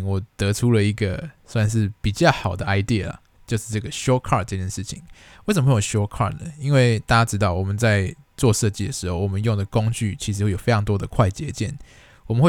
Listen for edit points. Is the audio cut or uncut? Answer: uncut